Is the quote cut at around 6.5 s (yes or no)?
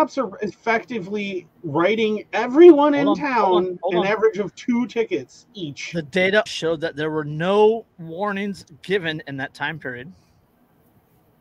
yes